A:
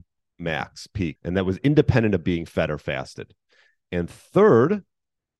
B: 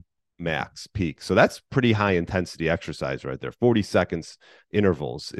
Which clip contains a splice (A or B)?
A